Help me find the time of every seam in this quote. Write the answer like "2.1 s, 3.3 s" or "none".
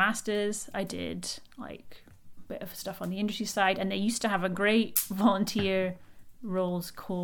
none